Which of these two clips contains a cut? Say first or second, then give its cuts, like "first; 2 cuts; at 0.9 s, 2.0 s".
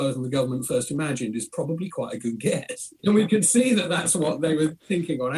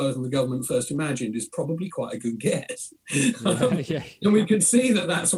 first; 1 cut; at 3.0 s